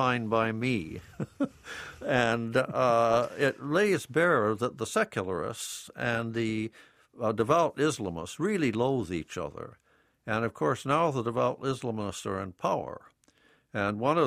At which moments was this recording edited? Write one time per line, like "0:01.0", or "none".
none